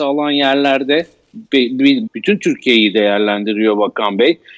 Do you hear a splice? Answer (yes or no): yes